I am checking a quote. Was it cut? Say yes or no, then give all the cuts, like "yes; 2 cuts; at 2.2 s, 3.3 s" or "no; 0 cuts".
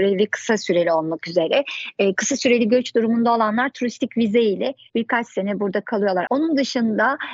yes; 1 cut; at 6.3 s